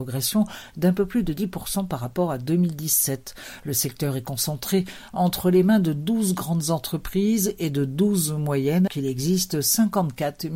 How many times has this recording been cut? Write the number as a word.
one